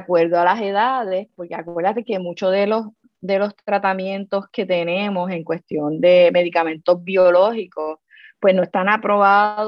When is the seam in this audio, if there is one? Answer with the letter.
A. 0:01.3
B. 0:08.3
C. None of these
C